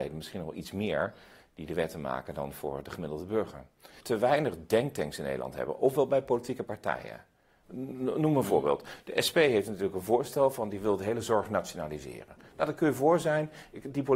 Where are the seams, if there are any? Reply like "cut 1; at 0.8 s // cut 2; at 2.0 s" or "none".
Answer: cut 1; at 4.0 s